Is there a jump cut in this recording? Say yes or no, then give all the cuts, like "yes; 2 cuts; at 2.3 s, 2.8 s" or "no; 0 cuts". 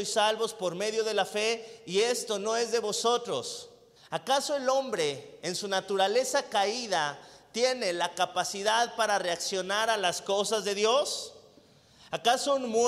yes; 1 cut; at 4.0 s